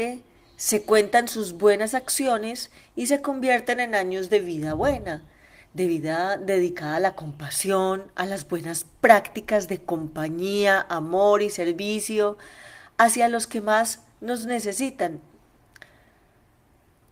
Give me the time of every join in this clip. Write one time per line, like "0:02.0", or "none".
none